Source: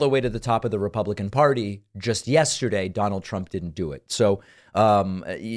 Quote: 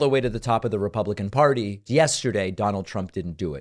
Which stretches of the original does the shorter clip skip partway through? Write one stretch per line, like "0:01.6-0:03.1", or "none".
0:01.9-0:02.2

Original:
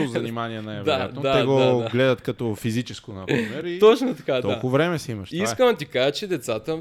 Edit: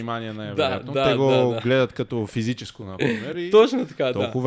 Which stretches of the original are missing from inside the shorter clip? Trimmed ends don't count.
none

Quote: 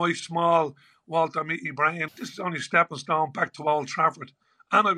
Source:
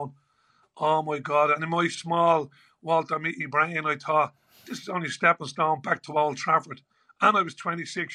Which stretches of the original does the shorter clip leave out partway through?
0:03.8-0:04.6

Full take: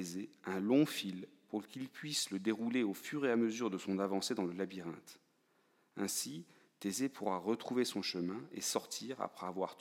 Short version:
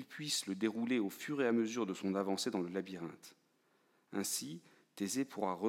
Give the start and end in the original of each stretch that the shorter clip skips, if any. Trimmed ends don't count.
none

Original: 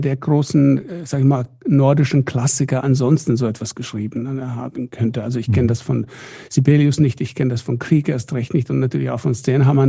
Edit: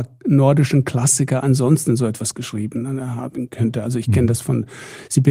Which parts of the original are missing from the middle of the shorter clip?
none

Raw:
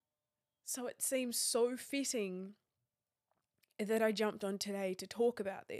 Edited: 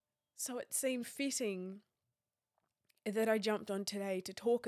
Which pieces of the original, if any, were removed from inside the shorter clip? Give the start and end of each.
0:01.3-0:01.8

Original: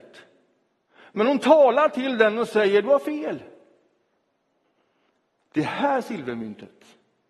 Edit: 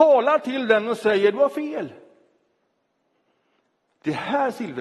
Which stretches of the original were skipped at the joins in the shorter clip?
none

